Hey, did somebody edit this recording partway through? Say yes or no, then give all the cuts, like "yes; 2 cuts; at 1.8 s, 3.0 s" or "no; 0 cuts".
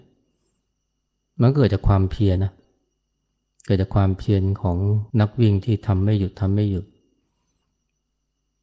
yes; 2 cuts; at 2.4 s, 5.1 s